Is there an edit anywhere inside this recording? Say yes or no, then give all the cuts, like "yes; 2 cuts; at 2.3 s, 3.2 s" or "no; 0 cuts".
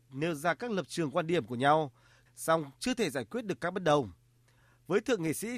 yes; 1 cut; at 2.3 s